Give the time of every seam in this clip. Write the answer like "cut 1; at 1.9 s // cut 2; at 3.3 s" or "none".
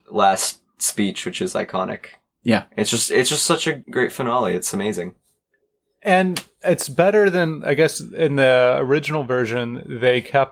cut 1; at 3.8 s